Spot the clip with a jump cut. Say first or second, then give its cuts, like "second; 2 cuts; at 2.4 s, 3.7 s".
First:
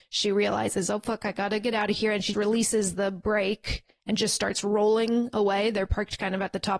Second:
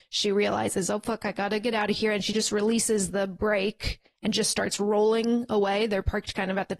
first; 1 cut; at 2.3 s